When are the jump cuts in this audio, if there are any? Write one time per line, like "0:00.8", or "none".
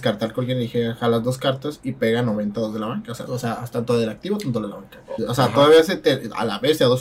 0:03.3
0:05.2